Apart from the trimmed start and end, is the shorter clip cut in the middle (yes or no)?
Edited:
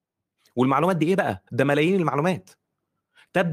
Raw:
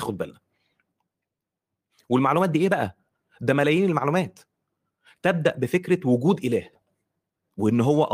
yes